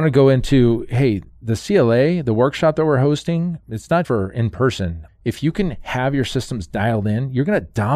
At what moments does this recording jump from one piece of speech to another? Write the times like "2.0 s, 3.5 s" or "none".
4.0 s, 5.1 s